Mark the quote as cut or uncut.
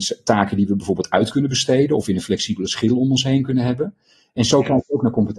uncut